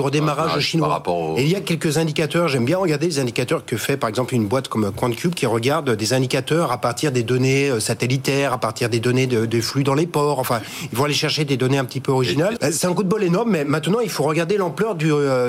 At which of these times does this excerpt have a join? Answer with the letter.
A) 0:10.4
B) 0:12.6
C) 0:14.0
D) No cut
B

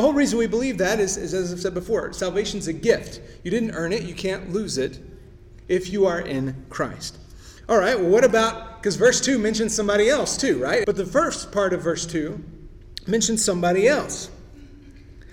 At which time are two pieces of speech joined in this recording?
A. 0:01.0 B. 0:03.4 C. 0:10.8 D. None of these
C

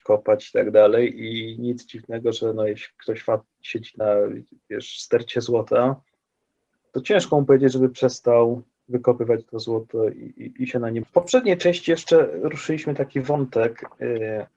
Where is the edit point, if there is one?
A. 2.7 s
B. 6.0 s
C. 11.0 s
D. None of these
C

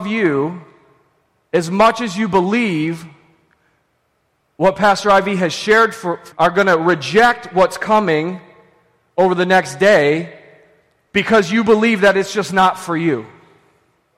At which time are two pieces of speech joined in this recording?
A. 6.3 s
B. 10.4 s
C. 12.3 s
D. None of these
A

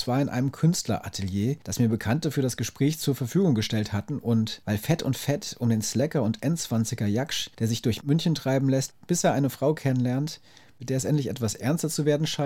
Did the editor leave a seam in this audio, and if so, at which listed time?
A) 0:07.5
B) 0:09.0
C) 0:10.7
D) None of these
D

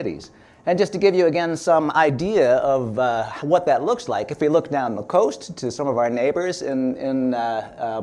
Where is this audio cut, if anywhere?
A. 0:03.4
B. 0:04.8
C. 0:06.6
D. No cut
D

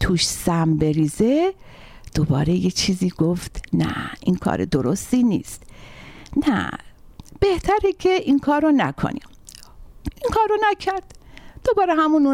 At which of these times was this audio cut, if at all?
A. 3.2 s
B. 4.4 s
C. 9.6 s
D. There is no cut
B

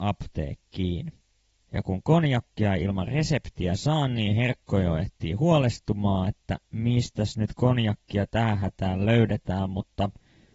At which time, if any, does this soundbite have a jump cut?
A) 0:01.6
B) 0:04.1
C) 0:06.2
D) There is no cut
A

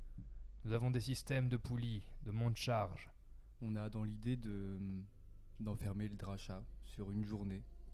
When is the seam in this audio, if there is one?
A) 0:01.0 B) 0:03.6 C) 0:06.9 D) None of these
B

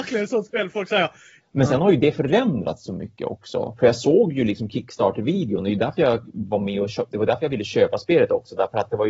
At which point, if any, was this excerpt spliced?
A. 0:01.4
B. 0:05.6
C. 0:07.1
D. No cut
A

